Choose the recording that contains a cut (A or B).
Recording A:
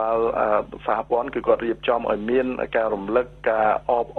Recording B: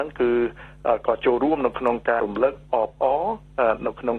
B